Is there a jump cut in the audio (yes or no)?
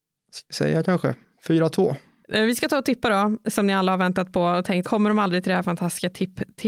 yes